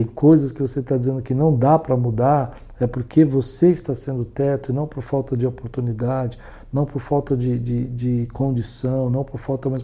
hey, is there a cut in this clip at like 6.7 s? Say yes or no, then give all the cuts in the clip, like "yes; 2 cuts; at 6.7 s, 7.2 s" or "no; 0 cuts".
no; 0 cuts